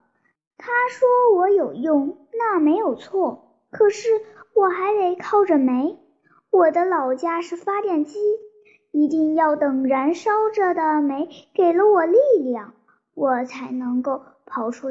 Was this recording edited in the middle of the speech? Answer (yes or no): no